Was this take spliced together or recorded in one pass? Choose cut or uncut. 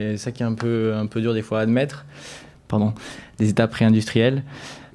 cut